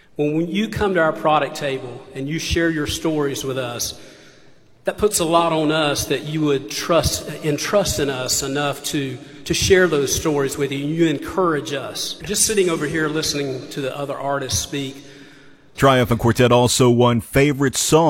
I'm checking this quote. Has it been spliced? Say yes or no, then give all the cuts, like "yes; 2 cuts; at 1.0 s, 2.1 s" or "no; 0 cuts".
yes; 2 cuts; at 12.2 s, 15.7 s